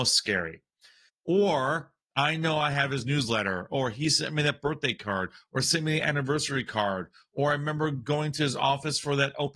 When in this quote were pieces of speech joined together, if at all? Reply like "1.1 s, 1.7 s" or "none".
1.1 s